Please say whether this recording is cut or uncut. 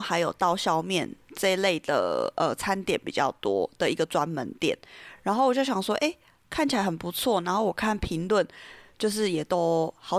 uncut